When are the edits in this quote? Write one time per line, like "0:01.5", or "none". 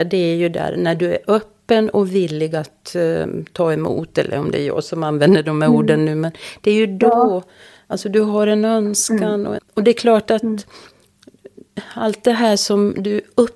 0:09.6